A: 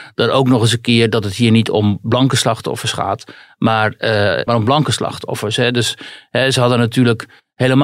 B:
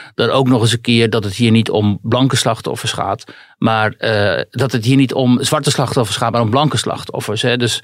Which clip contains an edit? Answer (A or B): A